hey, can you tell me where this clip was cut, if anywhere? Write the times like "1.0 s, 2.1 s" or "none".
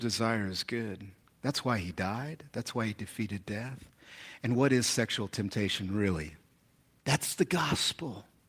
1.3 s, 7.0 s